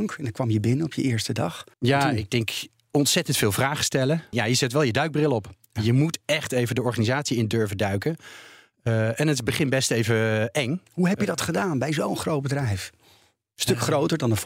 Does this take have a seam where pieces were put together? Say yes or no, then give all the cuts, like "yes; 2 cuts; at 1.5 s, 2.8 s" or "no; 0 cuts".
yes; 2 cuts; at 1.7 s, 4.3 s